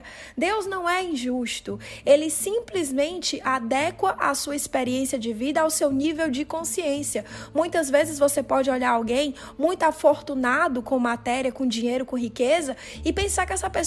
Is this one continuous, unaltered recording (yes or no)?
yes